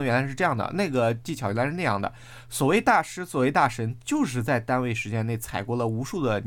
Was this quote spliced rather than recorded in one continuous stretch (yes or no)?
no